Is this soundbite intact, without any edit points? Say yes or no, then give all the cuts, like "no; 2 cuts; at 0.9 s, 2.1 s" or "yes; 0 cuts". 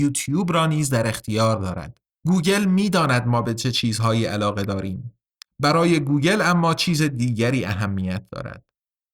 no; 2 cuts; at 2.2 s, 5.5 s